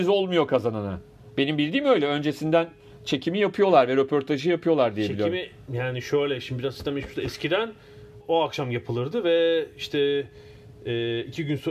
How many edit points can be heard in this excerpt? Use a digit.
1